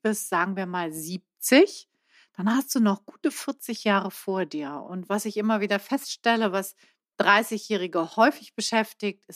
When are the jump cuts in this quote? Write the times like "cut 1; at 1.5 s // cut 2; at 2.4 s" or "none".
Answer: cut 1; at 4.8 s